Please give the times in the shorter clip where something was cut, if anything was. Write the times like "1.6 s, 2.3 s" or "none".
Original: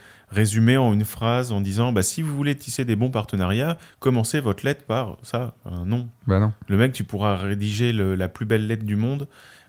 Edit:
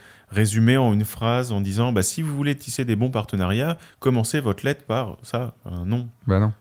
none